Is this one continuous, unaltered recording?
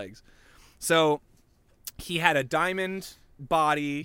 yes; 0 cuts

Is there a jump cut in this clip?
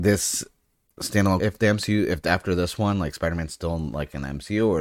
yes; 1 cut; at 1.4 s

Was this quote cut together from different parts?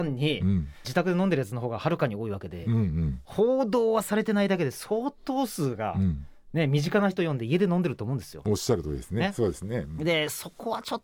no; 0 cuts

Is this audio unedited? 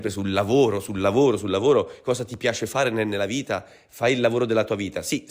yes; 0 cuts

